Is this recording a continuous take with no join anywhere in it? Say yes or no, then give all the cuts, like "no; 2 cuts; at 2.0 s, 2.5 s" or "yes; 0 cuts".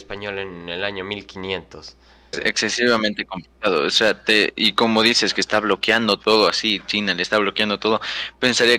no; 1 cut; at 2.3 s